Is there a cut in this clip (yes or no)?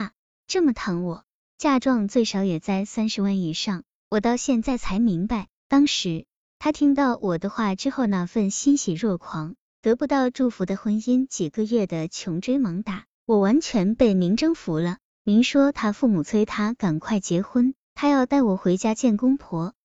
no